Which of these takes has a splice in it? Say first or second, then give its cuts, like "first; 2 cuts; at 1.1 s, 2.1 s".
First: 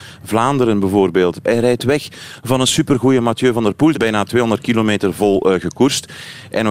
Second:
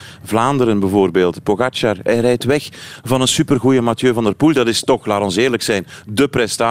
first; 2 cuts; at 1.4 s, 3.9 s